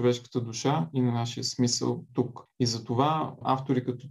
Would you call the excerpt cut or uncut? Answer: uncut